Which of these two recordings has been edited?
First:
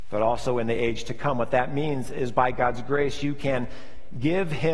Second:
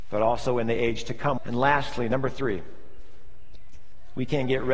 second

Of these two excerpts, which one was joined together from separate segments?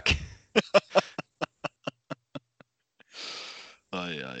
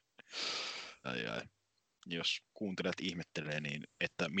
second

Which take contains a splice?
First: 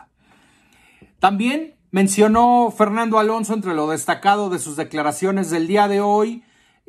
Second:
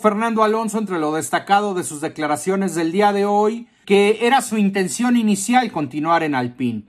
second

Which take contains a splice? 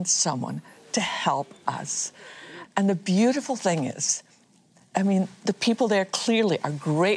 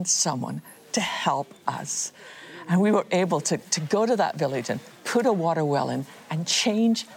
first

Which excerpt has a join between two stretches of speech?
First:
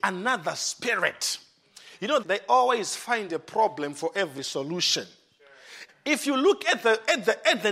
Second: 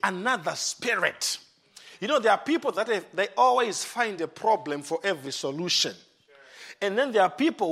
first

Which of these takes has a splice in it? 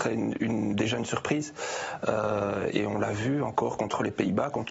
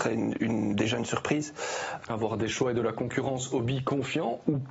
second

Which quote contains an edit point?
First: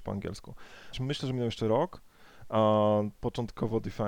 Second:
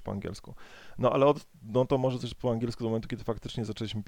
first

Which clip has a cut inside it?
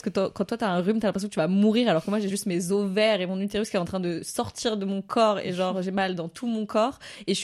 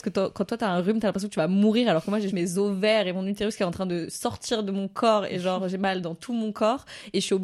second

